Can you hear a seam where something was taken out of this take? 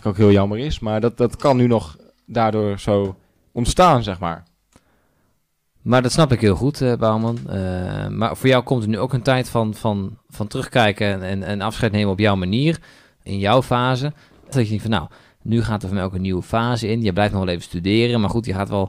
yes; 1 cut; at 14.5 s

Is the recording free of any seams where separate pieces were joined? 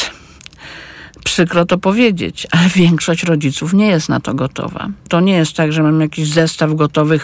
no; 1 cut; at 5.1 s

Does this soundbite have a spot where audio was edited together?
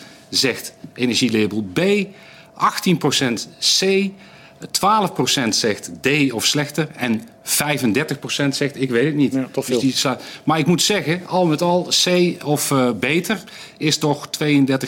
no; 0 cuts

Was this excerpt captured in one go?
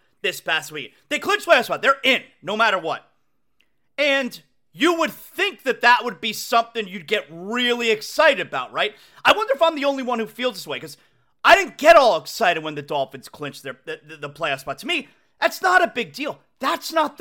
yes; 0 cuts

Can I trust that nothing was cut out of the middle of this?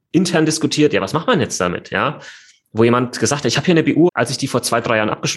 no; 1 cut; at 4.1 s

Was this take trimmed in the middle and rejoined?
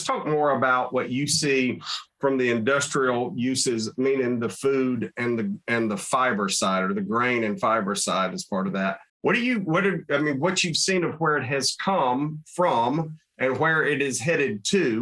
yes; 1 cut; at 9.1 s

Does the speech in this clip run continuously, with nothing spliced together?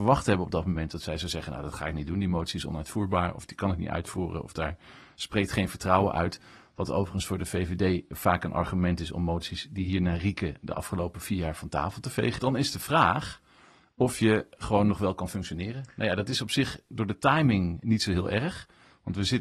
no; 1 cut; at 12.4 s

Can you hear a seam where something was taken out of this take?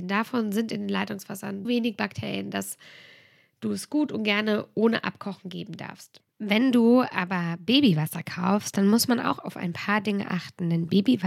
yes; 1 cut; at 1.6 s

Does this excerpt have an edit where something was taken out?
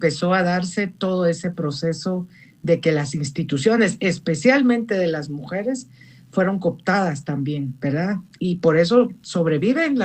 no; 0 cuts

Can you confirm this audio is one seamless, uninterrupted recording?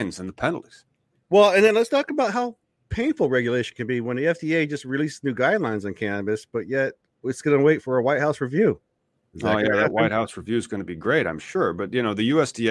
yes; 0 cuts

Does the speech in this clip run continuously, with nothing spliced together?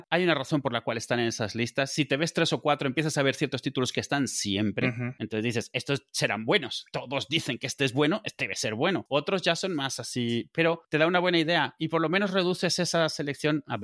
yes; 0 cuts

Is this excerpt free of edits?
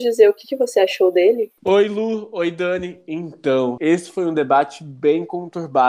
no; 2 cuts; at 1.6 s, 3.8 s

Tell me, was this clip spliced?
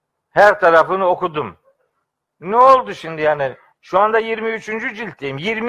yes; 1 cut; at 3.7 s

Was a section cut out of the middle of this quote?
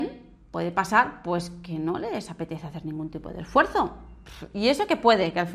no; 0 cuts

